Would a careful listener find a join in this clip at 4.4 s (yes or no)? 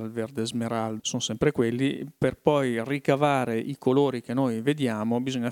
no